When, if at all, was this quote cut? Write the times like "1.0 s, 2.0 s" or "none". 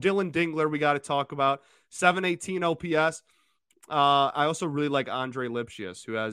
none

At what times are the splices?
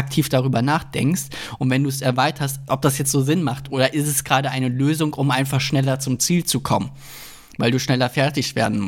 2.7 s

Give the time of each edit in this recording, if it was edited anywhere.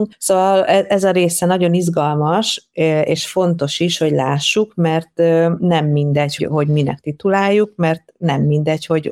6.4 s

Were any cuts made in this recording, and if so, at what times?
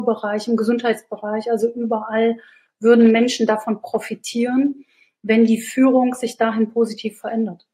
none

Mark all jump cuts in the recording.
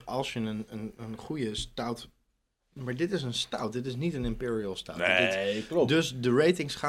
none

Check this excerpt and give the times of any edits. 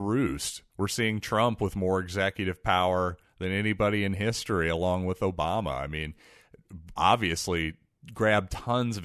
7.0 s

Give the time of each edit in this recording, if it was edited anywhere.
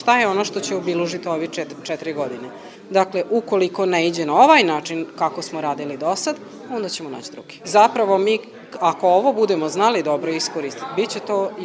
2.7 s, 7.6 s

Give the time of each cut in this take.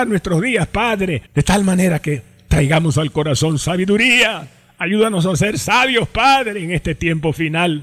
1.3 s

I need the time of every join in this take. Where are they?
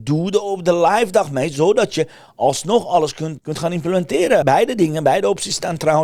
3.4 s, 4.4 s

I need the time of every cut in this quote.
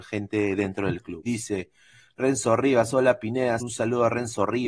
1.3 s, 3.6 s

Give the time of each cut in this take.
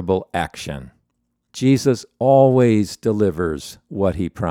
none

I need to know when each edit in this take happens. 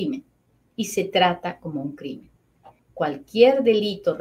2.8 s

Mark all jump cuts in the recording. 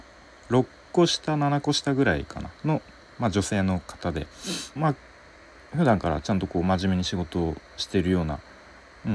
4.8 s, 7.7 s

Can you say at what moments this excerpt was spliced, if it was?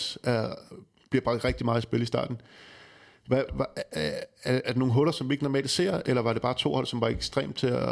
3.5 s, 4.6 s

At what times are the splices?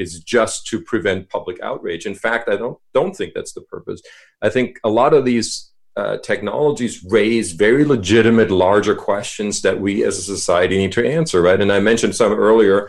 none

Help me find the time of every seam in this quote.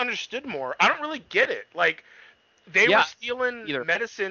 none

